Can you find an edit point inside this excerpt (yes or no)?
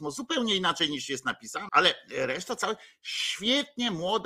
yes